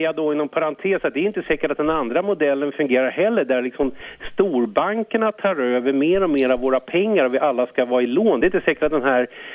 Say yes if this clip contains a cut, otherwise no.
no